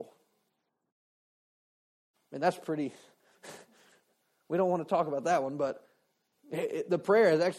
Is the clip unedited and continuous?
yes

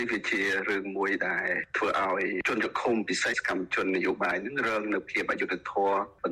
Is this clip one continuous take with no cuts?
no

